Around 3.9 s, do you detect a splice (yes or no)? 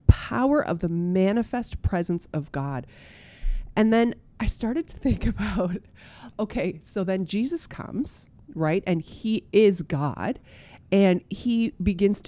no